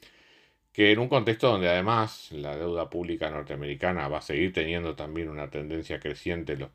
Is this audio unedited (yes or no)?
yes